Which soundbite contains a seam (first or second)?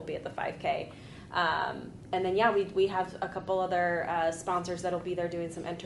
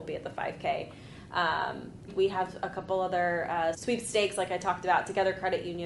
second